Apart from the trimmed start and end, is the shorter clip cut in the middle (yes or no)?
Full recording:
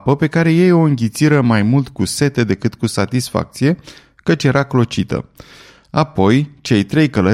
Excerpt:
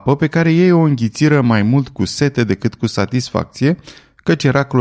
no